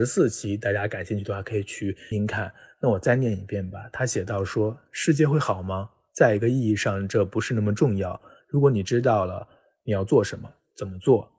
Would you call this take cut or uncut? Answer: cut